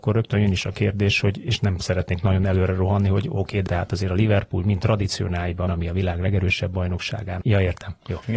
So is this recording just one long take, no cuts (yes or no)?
no